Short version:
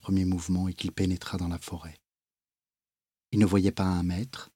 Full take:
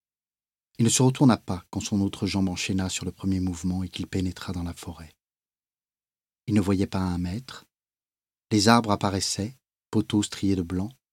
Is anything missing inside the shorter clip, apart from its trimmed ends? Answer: no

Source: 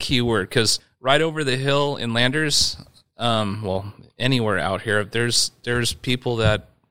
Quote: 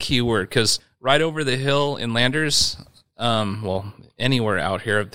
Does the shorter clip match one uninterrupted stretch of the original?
yes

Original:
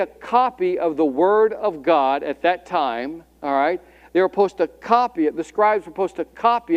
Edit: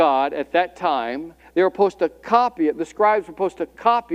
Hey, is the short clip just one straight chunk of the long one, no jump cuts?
no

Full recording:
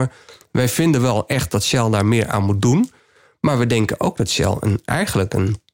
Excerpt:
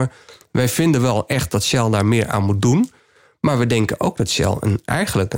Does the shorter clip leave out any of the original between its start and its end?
no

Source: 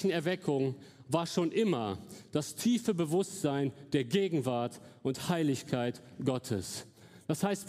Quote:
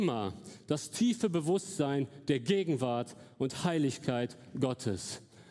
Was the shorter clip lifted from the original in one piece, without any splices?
yes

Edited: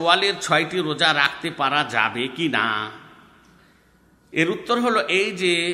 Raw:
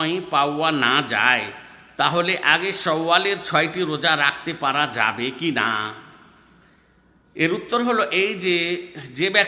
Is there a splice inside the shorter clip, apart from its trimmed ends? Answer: no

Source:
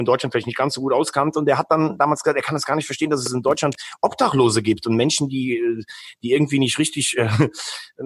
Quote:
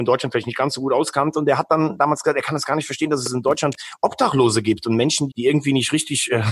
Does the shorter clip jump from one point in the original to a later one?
yes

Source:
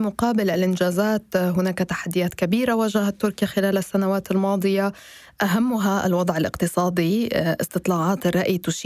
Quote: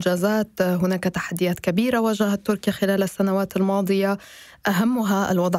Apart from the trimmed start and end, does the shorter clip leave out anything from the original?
no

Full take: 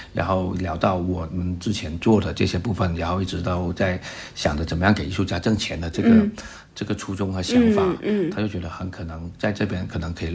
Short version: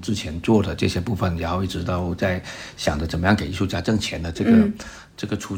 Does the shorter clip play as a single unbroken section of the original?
yes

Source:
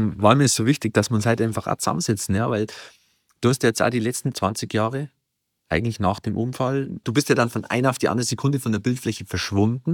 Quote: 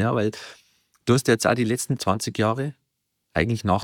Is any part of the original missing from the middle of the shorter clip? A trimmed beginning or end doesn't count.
no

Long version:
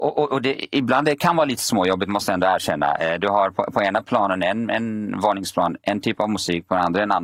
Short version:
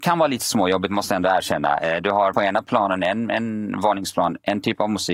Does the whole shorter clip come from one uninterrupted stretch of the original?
no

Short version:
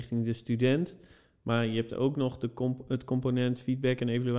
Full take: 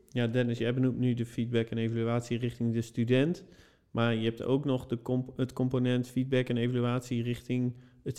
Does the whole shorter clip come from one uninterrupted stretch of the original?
yes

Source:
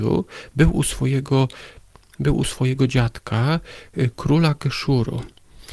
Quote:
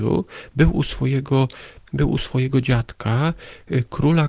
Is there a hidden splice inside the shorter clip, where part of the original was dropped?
yes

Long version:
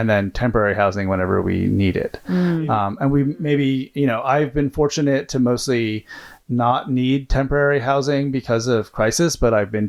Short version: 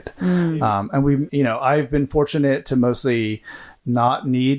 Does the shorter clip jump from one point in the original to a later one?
yes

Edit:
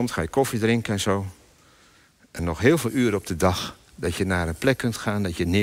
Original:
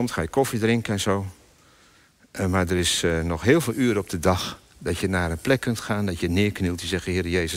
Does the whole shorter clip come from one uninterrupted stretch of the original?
no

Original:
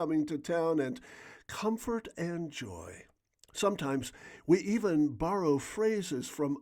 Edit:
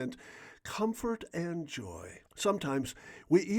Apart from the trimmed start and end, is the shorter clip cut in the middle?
yes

